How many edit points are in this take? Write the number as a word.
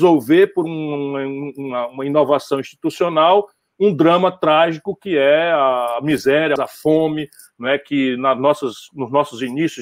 one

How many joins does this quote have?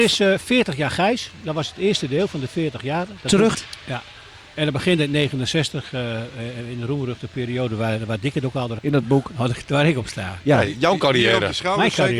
two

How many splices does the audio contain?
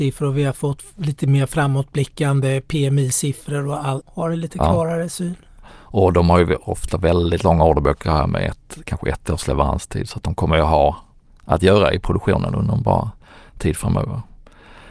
two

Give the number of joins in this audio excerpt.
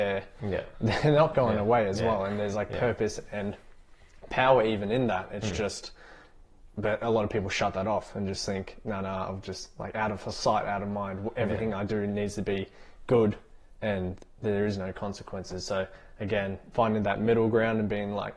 zero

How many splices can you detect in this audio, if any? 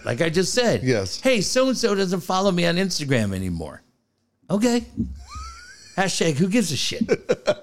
zero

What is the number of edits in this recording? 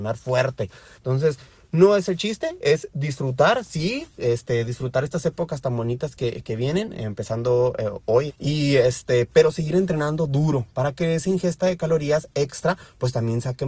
two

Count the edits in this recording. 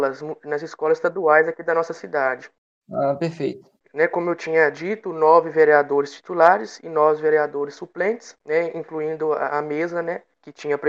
two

